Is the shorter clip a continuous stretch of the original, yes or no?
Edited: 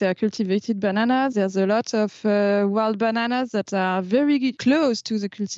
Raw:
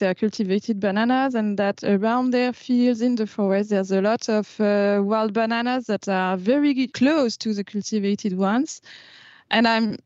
no